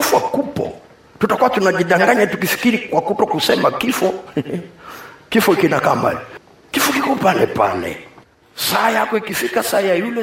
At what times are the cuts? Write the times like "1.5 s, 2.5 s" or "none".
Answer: none